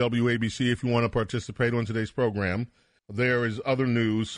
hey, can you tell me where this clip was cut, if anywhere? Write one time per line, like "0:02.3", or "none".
0:03.0